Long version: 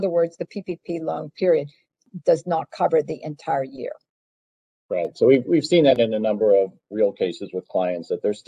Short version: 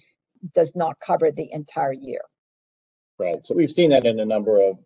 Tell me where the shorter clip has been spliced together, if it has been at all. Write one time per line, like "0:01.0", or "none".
0:03.5